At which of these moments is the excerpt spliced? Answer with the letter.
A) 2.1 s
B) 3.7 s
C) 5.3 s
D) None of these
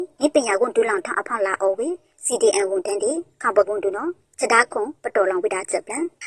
B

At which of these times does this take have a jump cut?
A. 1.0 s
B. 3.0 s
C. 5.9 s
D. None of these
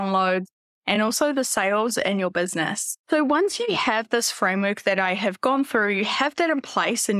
D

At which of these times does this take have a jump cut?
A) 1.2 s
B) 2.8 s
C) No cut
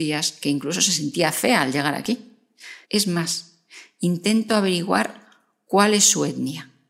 B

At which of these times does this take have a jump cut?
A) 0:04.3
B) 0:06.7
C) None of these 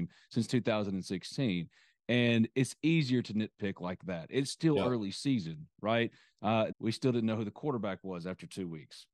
B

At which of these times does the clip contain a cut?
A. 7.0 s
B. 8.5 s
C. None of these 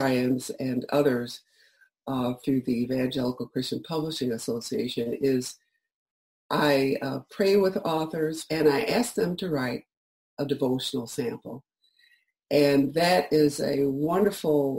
B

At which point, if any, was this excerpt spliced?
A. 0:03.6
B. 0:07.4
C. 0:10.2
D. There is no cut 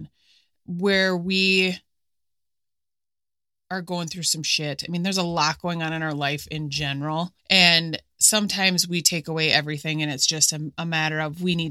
B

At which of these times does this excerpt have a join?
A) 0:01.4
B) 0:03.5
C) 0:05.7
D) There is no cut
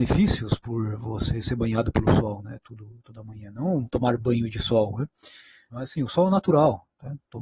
C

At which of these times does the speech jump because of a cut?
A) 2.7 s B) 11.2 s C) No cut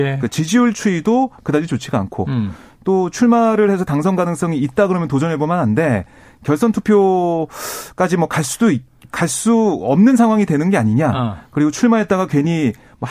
C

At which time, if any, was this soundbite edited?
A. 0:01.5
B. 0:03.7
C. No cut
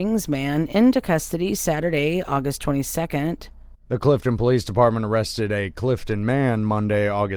B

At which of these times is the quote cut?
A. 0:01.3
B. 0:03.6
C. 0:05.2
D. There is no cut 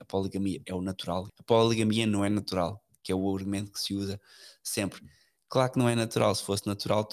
A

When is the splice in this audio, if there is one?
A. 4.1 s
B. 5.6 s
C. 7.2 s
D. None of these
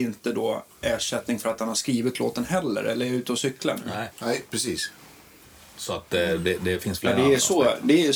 A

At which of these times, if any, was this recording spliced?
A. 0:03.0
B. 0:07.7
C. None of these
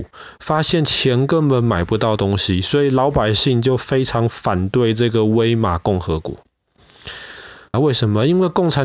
B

